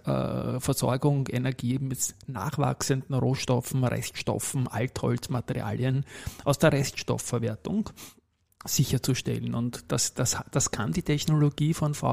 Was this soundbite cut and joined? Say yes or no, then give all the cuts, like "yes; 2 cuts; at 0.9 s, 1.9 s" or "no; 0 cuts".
no; 0 cuts